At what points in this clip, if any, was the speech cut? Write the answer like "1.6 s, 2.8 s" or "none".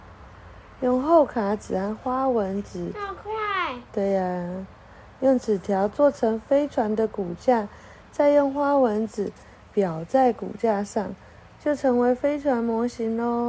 11.5 s